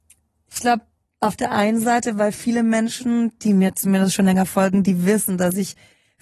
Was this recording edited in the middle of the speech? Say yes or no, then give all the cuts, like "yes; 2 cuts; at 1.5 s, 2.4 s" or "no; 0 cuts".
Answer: no; 0 cuts